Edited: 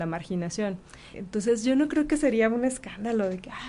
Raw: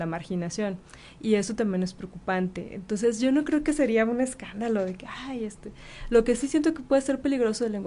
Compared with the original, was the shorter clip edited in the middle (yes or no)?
yes